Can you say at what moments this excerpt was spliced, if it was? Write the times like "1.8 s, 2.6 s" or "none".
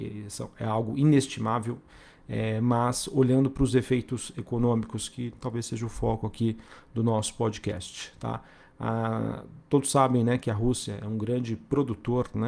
none